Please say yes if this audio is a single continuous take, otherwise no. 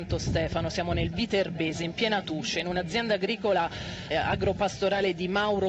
no